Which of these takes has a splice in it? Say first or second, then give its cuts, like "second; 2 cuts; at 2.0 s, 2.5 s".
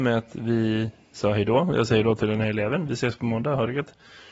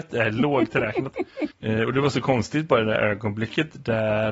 second; 1 cut; at 1.5 s